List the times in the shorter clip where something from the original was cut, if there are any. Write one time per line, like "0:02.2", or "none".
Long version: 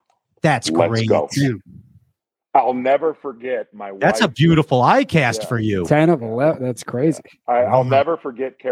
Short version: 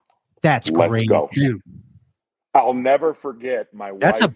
none

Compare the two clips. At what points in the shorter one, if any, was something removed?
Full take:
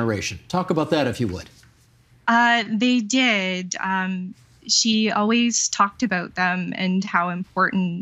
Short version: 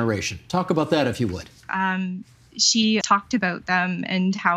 0:01.7
0:03.0

